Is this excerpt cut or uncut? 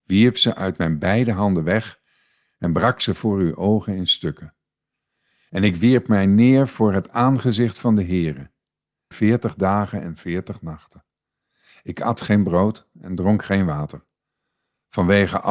cut